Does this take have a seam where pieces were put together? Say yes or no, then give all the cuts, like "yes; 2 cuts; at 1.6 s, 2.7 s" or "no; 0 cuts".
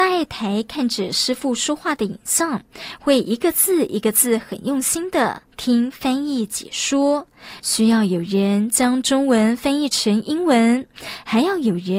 yes; 2 cuts; at 5.5 s, 7.6 s